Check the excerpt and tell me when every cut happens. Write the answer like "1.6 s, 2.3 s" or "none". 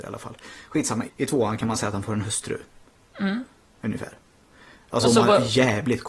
1.1 s